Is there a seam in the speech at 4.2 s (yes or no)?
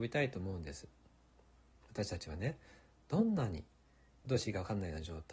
yes